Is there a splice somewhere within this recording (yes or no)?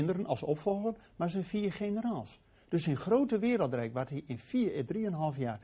no